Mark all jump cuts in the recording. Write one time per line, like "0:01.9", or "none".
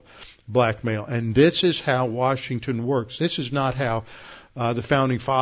none